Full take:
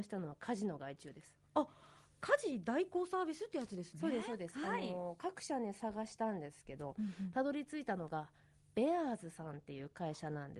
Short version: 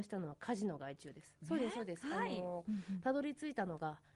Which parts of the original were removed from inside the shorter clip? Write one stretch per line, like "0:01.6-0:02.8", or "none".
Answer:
0:01.4-0:03.9
0:05.2-0:06.9

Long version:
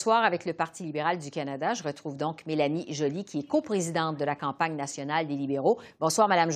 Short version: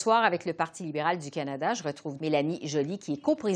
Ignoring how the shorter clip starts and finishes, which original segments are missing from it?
0:02.2-0:02.4

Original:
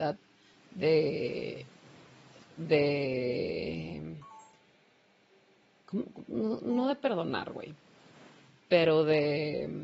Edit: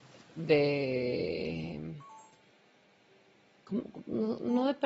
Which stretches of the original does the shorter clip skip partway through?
none

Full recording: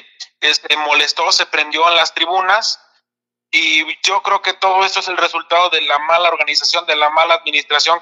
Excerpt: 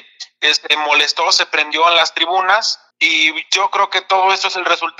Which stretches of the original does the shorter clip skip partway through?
0:02.9-0:03.4

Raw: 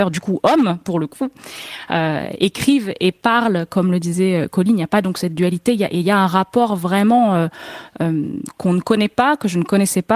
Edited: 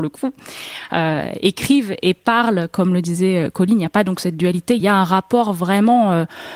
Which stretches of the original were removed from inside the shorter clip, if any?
0:05.8-0:06.0

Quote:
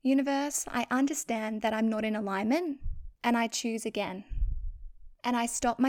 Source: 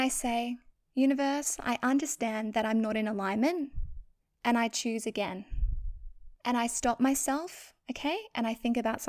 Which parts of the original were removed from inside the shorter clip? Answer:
0:04.1-0:04.4

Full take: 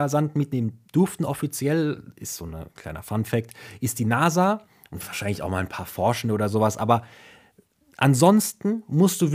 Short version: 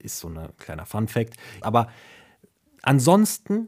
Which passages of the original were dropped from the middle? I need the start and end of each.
0:03.8-0:06.8

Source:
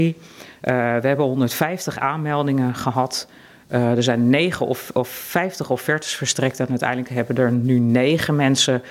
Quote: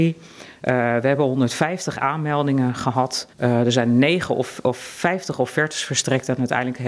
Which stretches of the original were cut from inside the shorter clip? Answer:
0:03.3-0:03.6

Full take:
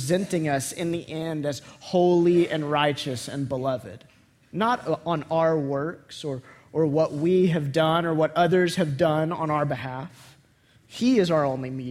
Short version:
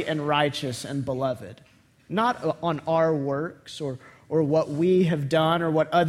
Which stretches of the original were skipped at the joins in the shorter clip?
none

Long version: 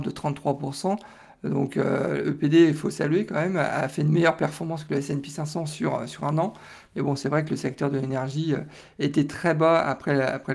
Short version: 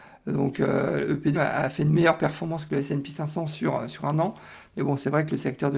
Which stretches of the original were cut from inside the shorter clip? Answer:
0:02.5-0:03.5

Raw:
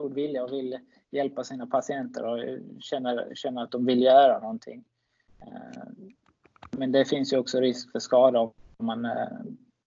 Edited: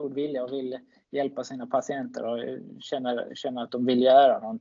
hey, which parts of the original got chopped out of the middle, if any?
none

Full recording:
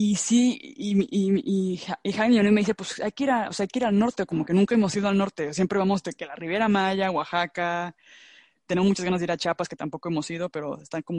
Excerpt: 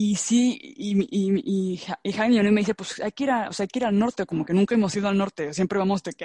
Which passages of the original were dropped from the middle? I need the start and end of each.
none

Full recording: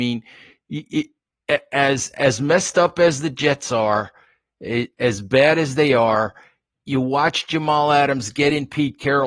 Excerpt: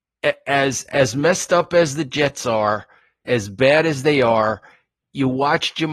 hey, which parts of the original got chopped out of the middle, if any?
0:04.5-0:04.9

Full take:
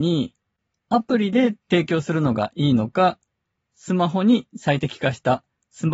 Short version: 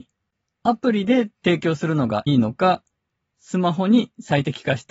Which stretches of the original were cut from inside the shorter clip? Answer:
0:02.5-0:02.6

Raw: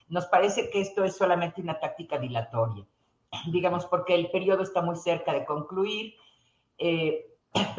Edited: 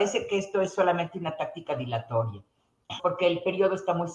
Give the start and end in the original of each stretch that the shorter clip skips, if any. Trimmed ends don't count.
0:03.4-0:03.9

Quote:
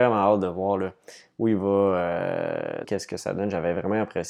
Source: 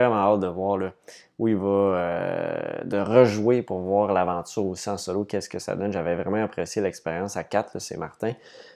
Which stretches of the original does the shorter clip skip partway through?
0:02.8-0:05.3

